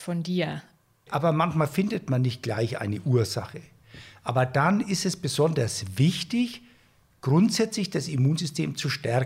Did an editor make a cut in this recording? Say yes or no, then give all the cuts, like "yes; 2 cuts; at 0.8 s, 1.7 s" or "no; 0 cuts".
yes; 1 cut; at 1.1 s